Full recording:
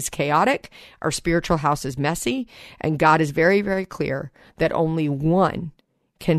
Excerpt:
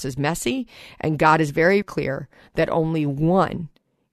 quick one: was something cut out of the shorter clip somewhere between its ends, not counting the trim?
yes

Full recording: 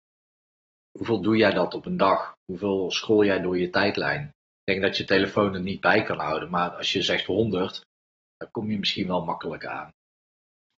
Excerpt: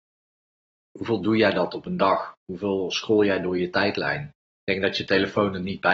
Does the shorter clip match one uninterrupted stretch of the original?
yes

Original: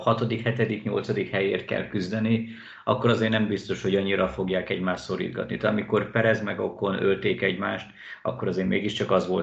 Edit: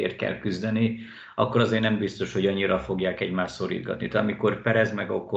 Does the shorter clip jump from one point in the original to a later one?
no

